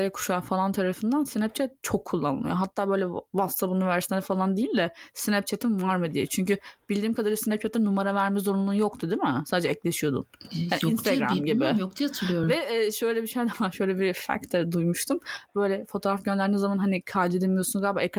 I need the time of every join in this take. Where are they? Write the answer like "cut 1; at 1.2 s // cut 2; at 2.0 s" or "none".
none